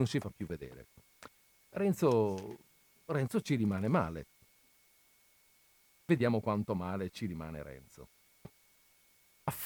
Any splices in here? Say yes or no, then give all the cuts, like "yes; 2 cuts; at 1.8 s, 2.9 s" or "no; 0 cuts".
no; 0 cuts